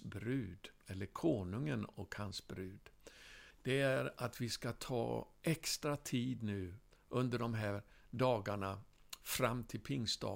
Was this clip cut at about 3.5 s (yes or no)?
yes